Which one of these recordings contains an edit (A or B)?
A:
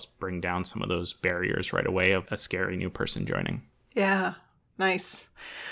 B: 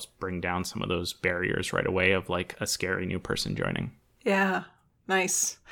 A